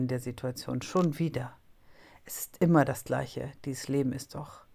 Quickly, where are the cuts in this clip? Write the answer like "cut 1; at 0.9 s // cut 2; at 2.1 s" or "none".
none